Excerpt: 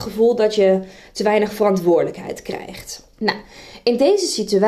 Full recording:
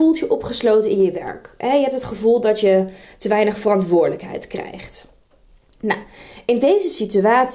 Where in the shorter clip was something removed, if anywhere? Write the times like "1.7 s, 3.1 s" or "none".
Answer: 3.1 s

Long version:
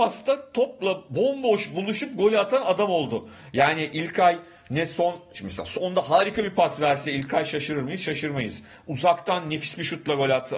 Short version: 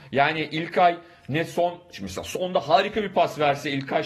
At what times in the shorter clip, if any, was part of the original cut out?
none

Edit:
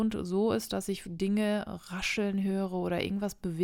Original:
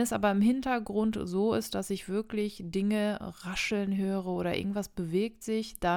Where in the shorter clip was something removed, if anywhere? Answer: 1.0 s

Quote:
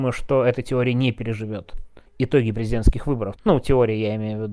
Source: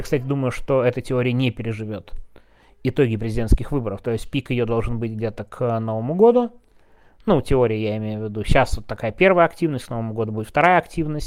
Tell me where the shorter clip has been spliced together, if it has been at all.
2.1 s, 3.4 s

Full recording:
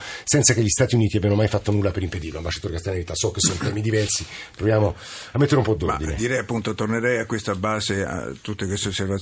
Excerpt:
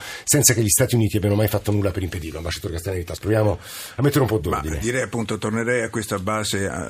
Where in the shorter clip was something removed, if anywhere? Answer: 3.1 s

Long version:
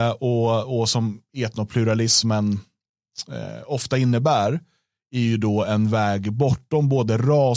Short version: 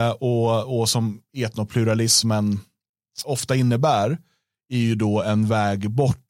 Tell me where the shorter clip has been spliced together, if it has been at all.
3.2 s

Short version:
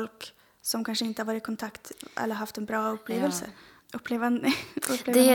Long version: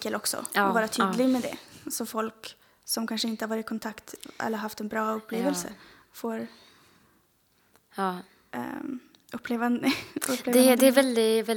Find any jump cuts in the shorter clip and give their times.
3.8 s

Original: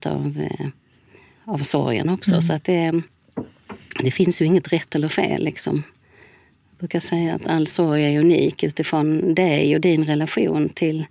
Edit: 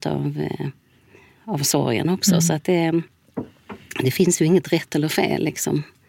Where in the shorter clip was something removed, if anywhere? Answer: none

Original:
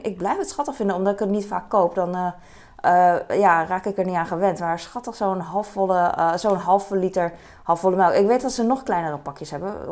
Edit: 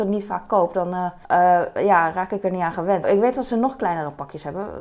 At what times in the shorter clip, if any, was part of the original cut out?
1.2 s, 3.0 s

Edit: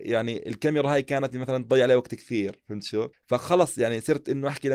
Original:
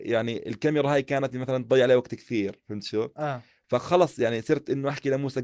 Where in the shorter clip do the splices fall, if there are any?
3.1 s

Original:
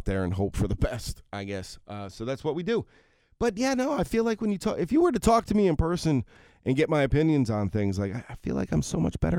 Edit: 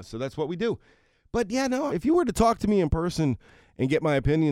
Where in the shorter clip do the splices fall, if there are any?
1.9 s

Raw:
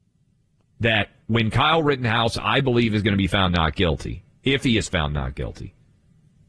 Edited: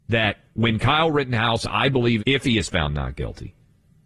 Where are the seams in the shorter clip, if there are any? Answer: 2.2 s

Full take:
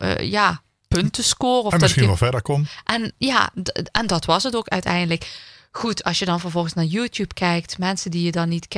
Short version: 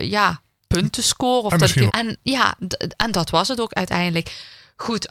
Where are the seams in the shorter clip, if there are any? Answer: 1.9 s

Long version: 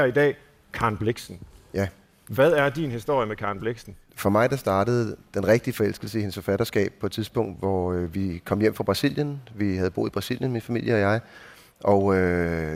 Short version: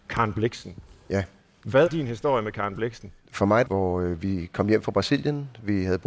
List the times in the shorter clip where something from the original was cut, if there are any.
1.9 s, 3.7 s

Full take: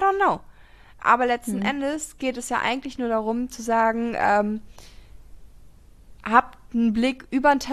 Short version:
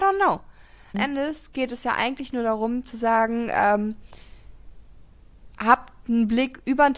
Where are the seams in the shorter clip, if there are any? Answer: 0.9 s

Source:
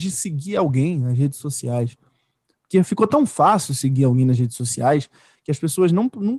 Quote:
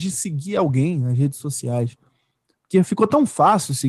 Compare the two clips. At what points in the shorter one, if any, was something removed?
none

